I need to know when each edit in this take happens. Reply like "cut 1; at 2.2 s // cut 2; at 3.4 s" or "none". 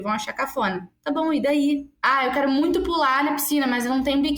none